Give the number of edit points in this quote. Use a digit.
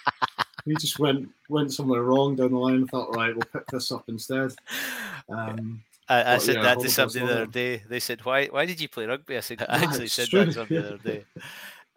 1